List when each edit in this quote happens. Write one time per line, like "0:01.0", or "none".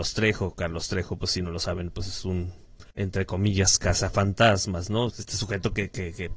0:02.9
0:05.1